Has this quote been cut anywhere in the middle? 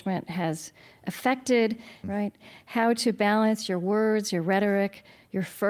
yes; 1 cut; at 2.0 s

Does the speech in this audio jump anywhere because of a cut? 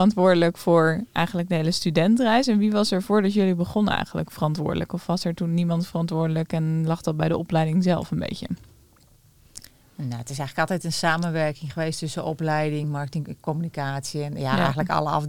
no; 0 cuts

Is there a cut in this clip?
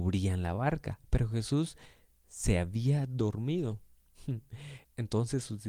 no; 0 cuts

